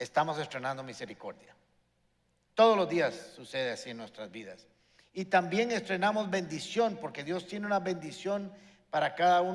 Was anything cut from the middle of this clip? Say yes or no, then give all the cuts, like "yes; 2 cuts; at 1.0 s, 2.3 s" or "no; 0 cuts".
no; 0 cuts